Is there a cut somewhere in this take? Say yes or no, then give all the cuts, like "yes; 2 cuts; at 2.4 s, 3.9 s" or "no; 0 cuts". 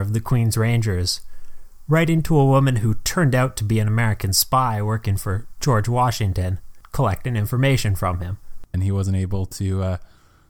yes; 1 cut; at 8.7 s